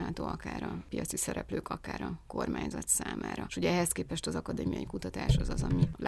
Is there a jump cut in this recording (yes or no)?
no